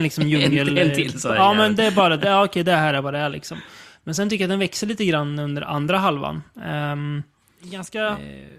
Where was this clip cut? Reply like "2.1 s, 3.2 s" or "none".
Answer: none